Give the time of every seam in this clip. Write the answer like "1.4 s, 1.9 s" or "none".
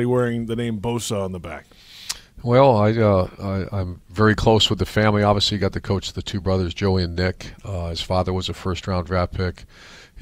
none